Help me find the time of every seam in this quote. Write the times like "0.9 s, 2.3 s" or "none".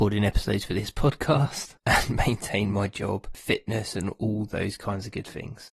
none